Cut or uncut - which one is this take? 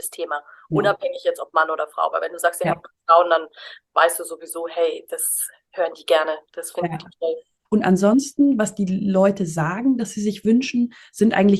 cut